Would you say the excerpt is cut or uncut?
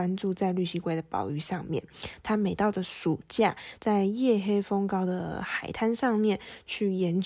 cut